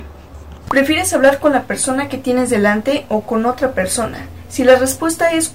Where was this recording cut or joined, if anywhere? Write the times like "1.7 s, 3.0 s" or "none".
none